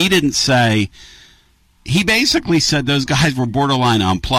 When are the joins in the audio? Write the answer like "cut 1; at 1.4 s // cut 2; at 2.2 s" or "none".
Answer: none

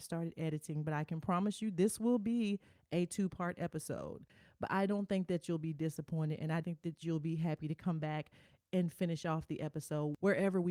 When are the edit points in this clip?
cut 1; at 6.6 s

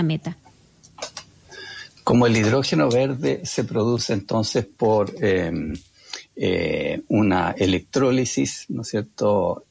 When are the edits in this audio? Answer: none

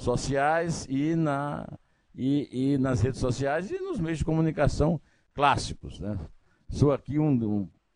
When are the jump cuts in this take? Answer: none

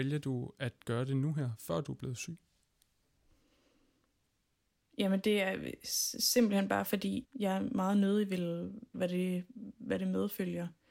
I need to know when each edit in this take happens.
cut 1; at 7.2 s // cut 2; at 8.9 s

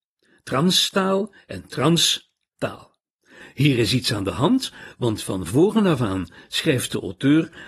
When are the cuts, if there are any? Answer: cut 1; at 3.4 s

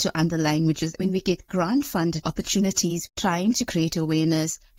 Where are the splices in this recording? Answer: cut 1; at 1.0 s // cut 2; at 3.1 s

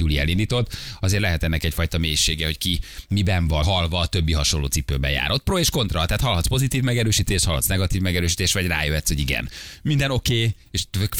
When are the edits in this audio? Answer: cut 1; at 3.6 s

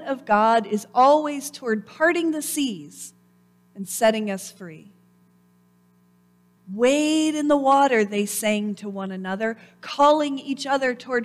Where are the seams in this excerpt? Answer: cut 1; at 6.6 s

